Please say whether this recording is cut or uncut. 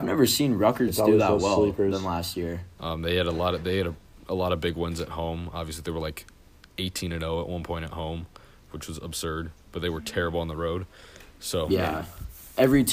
cut